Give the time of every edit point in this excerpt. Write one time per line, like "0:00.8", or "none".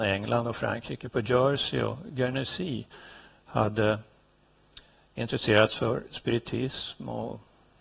none